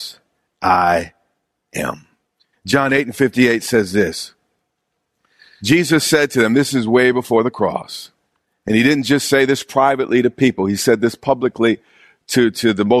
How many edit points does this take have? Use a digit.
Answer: 1